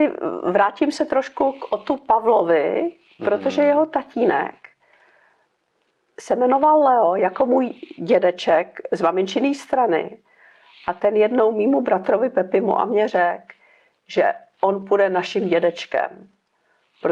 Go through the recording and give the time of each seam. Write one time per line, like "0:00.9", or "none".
none